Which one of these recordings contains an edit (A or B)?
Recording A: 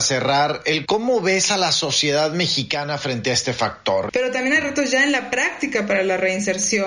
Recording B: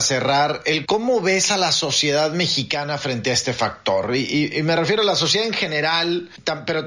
A